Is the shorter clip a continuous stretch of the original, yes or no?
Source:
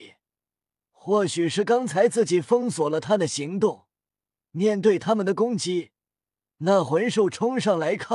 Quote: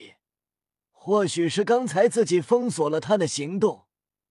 yes